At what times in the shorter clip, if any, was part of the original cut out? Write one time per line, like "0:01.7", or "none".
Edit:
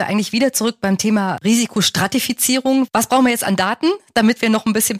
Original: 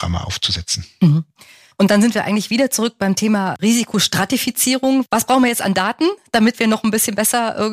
none